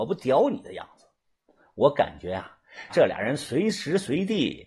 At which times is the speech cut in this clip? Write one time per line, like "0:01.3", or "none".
0:02.9